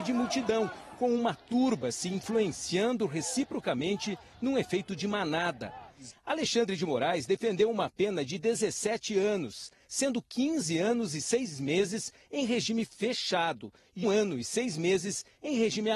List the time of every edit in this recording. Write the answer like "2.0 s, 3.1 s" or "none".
6.1 s, 14.0 s